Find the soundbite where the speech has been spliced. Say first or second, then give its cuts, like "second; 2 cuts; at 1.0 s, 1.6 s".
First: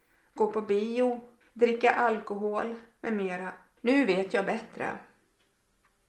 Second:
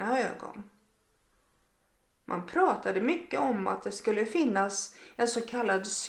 first; 2 cuts; at 1.4 s, 3.8 s